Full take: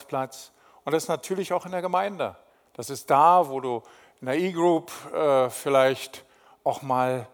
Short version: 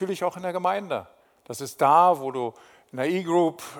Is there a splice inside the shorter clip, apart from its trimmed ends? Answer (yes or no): no